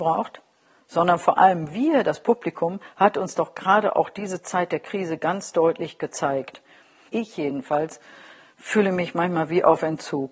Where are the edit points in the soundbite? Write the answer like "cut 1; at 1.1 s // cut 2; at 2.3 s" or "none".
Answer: cut 1; at 7.1 s